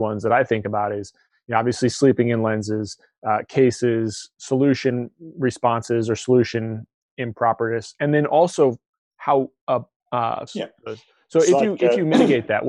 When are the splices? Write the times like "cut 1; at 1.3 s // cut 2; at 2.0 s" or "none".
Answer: cut 1; at 4.4 s // cut 2; at 10.5 s